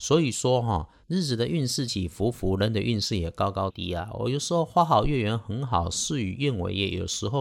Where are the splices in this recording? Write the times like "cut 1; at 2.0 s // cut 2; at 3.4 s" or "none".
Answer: cut 1; at 1.9 s // cut 2; at 3.7 s